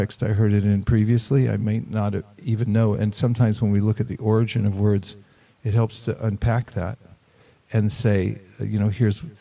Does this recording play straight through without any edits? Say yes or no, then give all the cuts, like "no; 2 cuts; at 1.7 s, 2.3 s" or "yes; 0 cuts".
yes; 0 cuts